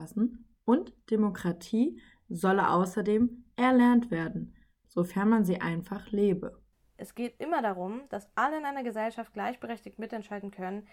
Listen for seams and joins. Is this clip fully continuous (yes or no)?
no